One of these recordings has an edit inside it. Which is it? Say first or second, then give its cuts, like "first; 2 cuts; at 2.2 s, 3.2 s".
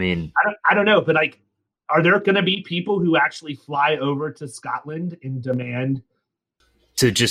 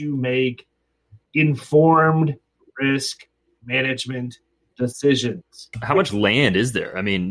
second; 1 cut; at 5.7 s